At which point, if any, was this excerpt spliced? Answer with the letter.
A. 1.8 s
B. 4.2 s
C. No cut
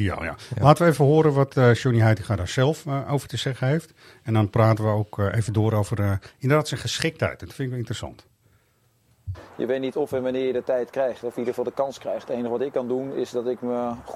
C